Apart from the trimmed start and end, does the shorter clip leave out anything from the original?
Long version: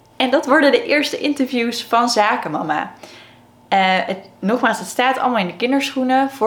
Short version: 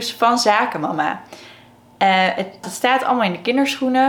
yes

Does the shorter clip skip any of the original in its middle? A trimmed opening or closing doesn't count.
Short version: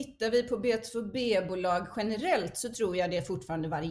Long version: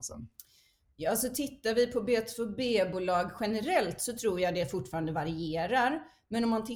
no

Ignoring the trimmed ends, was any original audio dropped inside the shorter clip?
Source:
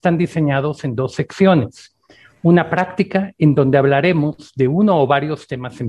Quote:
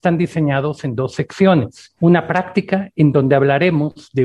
yes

